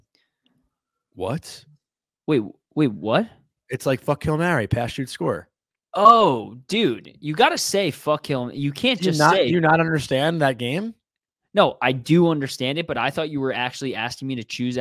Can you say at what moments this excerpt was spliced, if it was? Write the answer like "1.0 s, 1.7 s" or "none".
none